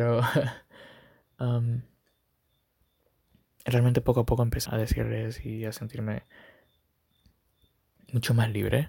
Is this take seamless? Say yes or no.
no